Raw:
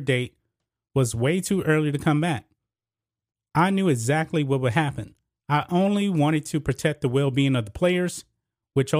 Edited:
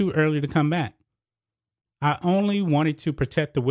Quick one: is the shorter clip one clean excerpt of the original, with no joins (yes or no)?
no